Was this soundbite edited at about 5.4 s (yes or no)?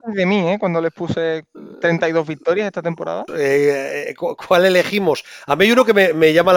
no